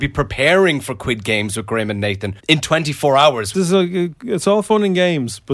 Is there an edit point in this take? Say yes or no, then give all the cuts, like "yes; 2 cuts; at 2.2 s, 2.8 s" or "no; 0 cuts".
yes; 2 cuts; at 2.4 s, 3.5 s